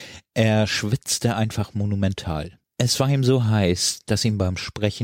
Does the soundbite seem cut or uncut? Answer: cut